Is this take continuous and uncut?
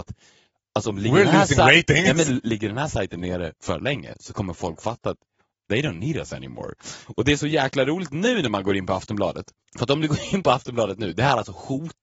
yes; 0 cuts

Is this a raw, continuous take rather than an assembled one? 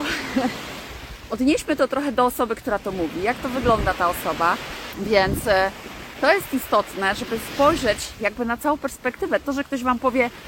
no; 1 cut; at 4.9 s

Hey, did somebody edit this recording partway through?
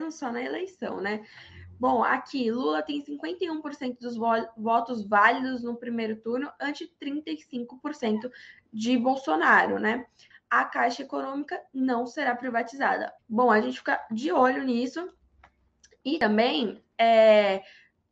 yes; 2 cuts; at 10.3 s, 13.2 s

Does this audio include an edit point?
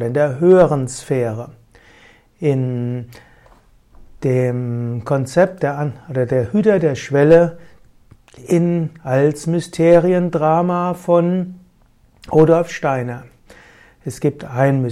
no; 0 cuts

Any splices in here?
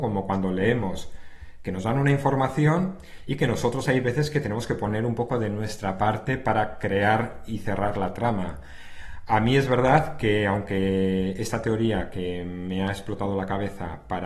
no; 0 cuts

